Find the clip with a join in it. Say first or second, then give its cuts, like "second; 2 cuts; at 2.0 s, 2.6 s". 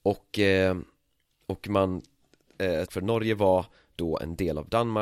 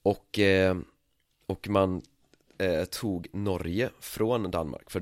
first; 1 cut; at 2.9 s